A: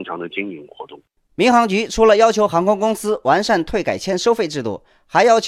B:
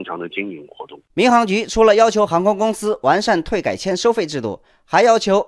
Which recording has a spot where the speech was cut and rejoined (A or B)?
B